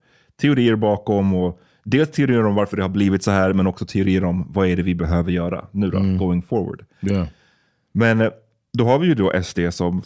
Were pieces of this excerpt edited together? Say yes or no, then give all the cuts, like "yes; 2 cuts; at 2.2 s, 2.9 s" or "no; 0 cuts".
no; 0 cuts